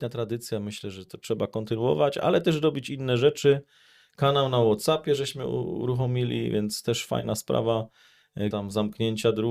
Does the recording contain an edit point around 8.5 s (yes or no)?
yes